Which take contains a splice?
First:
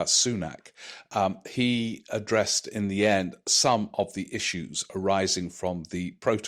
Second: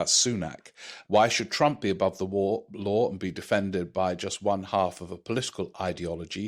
second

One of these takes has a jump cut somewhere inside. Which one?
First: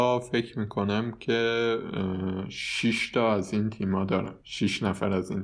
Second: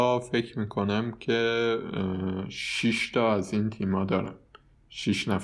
first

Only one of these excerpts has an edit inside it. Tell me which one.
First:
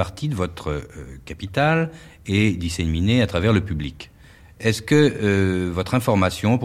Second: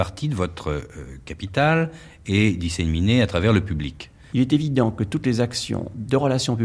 second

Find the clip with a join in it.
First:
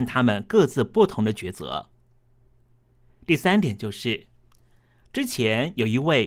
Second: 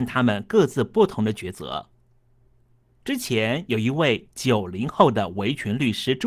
second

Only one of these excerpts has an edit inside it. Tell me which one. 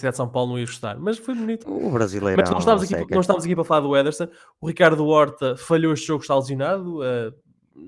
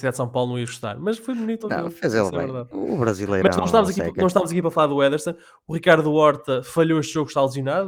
first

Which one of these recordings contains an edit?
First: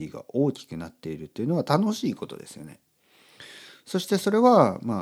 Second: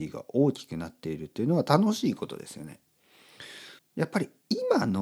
second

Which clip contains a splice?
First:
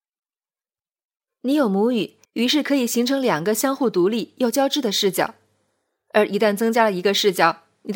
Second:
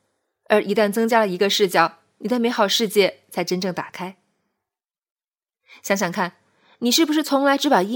first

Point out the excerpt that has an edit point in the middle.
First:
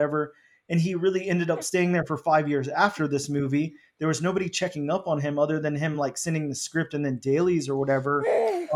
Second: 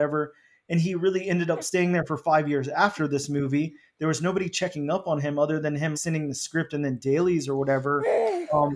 second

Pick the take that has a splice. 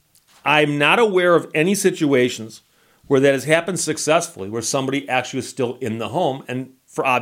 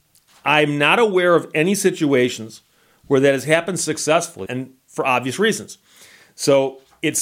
second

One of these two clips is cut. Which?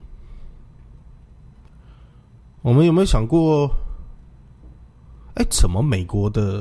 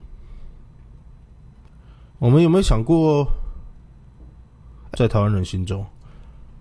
second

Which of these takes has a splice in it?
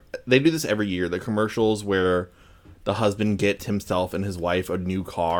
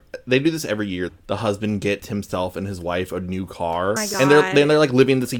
second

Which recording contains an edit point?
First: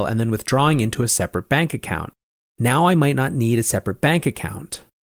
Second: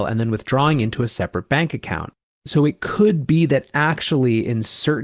second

